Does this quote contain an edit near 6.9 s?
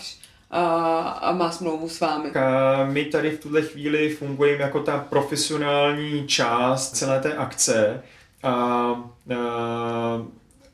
yes; 2 cuts; at 2.3 s, 6.9 s

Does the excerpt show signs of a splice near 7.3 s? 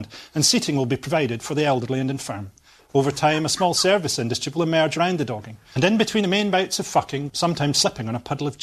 yes; 2 cuts; at 5.7 s, 7.3 s

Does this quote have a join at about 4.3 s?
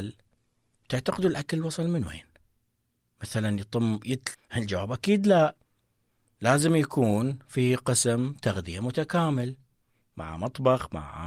yes; 1 cut; at 4.3 s

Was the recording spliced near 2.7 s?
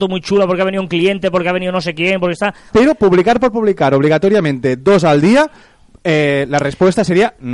yes; 1 cut; at 2.7 s

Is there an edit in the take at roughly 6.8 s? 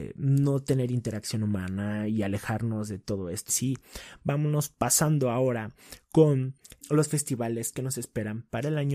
yes; 2 cuts; at 3.5 s, 6.8 s

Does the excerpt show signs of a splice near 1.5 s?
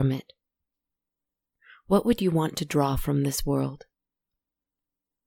no; 0 cuts

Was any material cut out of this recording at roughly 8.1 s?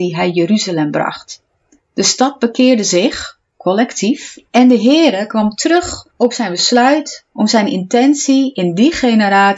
no; 3 cuts; at 1.8 s, 4.5 s, 6.1 s

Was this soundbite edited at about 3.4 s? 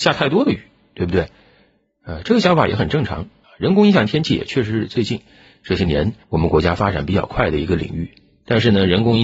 yes; 2 cuts; at 3.4 s, 6.2 s

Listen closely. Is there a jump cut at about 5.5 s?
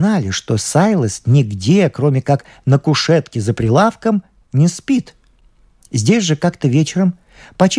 no; 0 cuts

